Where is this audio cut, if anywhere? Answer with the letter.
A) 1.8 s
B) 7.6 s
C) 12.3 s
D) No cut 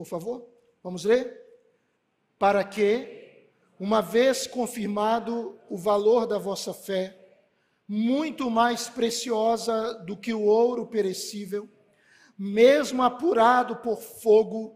D